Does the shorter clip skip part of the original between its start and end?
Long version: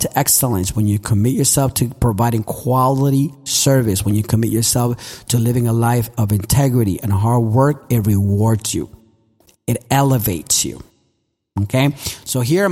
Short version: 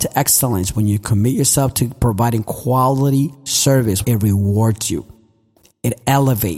yes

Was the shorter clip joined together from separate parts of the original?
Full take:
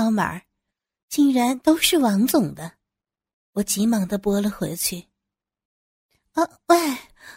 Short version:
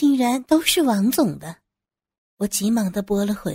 no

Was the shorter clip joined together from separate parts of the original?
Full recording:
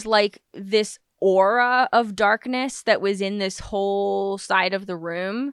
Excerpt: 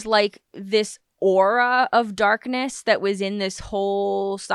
no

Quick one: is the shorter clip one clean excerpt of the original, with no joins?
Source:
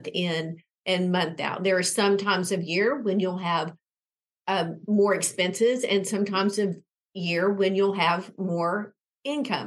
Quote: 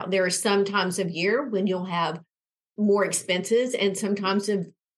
no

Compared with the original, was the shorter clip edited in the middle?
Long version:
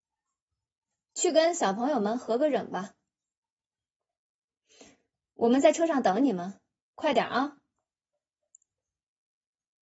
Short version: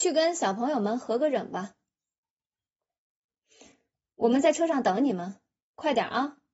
no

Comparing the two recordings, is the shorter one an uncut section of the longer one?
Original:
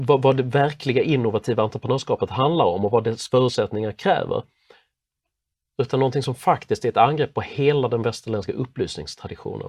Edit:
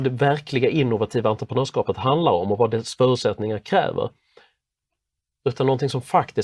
yes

